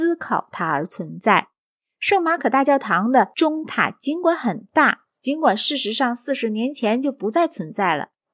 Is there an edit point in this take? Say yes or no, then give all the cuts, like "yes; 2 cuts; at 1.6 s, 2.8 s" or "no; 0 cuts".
no; 0 cuts